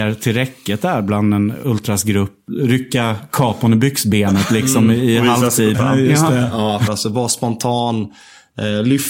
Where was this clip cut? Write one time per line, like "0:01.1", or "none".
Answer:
0:05.7
0:06.9